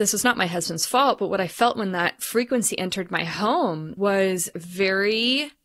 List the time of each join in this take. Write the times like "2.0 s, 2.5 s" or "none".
none